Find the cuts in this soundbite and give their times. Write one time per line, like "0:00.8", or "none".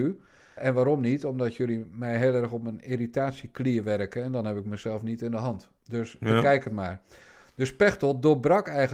none